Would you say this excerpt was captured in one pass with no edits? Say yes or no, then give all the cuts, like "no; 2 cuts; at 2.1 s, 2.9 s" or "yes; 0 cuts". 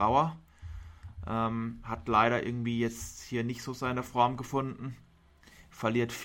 yes; 0 cuts